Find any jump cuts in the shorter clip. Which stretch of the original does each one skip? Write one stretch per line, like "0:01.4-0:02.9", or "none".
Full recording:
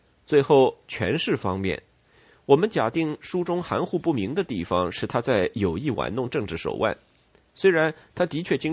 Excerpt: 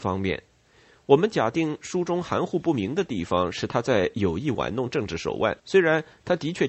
0:07.0-0:07.5